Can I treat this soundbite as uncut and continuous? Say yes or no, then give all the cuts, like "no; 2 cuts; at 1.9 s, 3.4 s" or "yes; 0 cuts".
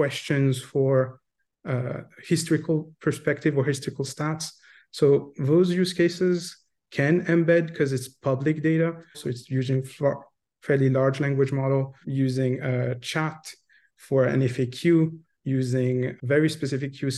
no; 3 cuts; at 9.1 s, 12.0 s, 16.2 s